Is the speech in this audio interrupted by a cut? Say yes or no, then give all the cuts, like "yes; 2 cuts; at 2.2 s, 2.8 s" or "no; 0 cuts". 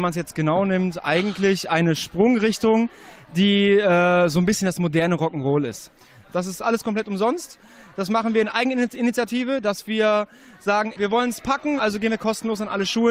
yes; 2 cuts; at 6.2 s, 11.8 s